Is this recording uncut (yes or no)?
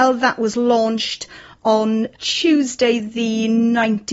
yes